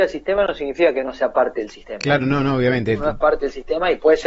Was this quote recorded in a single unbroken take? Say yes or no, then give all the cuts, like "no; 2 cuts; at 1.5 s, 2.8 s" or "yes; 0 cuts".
yes; 0 cuts